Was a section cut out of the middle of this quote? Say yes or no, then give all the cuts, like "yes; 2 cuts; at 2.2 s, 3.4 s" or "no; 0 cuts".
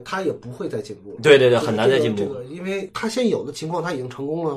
no; 0 cuts